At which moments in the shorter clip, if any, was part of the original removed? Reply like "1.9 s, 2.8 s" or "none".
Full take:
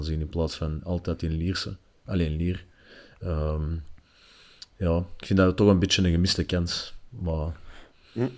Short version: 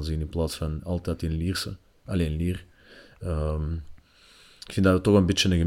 4.7 s

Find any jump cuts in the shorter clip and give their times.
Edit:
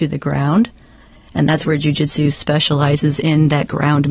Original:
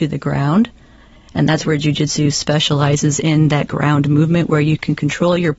none

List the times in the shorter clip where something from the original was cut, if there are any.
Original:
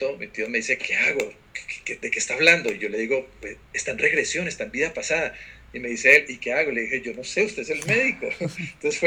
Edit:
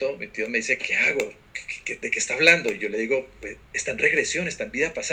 none

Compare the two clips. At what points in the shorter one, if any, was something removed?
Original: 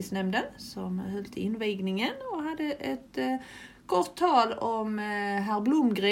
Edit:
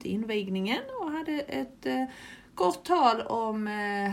none

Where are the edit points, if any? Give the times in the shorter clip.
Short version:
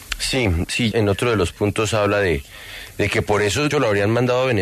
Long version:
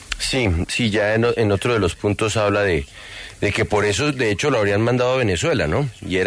0.9 s, 3.7 s

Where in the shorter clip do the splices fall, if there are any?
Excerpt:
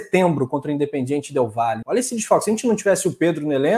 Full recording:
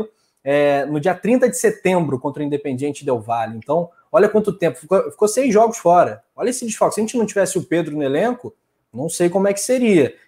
1.8 s

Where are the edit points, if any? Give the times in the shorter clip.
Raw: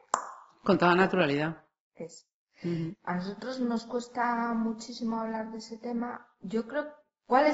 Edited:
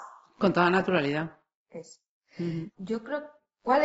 2.7 s

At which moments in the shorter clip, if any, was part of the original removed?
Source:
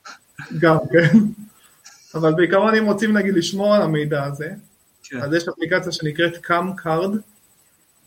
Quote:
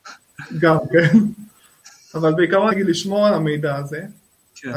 2.7 s

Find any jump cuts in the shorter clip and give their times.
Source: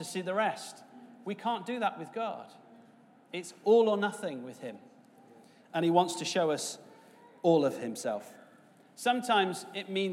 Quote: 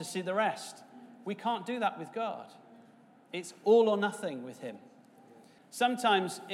5.6 s

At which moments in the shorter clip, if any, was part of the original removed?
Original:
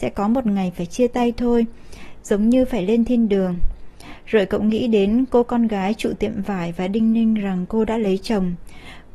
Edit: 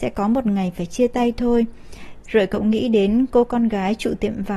2.2 s

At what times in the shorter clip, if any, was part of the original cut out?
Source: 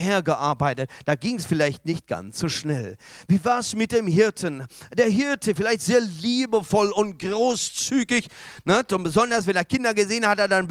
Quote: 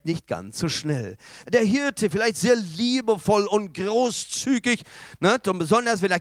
1.4 s

